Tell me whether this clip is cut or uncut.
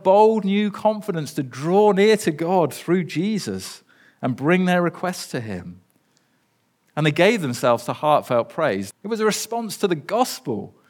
cut